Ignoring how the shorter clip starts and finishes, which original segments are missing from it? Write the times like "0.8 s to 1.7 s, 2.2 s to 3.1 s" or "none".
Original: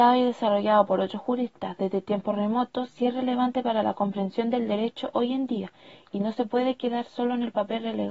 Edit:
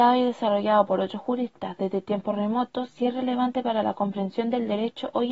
none